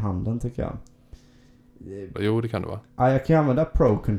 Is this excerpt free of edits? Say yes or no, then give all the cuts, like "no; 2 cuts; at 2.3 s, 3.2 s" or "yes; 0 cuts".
no; 1 cut; at 2.1 s